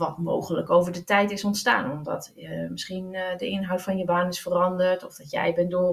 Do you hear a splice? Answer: no; 0 cuts

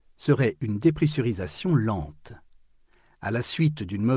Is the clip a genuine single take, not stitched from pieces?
yes; 0 cuts

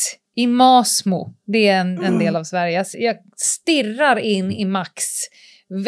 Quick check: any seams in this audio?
no; 0 cuts

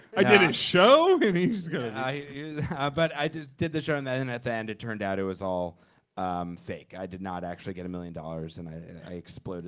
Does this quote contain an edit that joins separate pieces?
no; 0 cuts

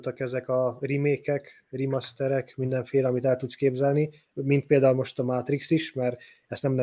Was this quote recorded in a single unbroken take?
yes; 0 cuts

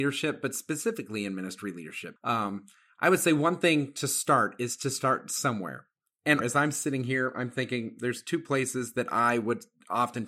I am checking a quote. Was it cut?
yes; 2 cuts; at 2.2 s, 6.4 s

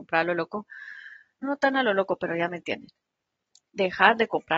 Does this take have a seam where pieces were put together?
yes; 1 cut; at 1.4 s

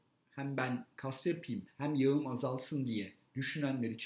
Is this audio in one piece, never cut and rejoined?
no; 1 cut; at 1.7 s

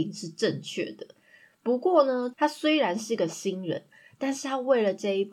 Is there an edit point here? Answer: yes; 1 cut; at 2.3 s

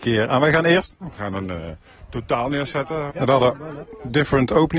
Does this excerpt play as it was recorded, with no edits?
no; 2 cuts; at 1.0 s, 3.1 s

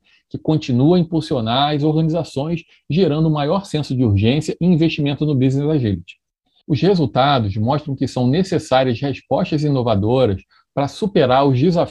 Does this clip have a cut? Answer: yes; 1 cut; at 6.6 s

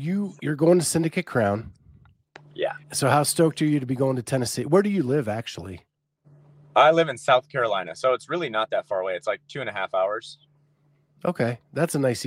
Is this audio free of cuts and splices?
no; 1 cut; at 2.8 s

